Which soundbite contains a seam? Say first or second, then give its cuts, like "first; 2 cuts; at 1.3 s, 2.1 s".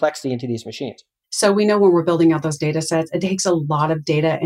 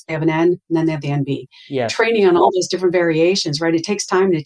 first; 1 cut; at 1.2 s